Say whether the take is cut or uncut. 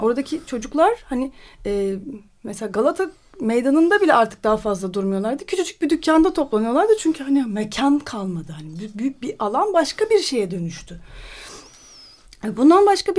uncut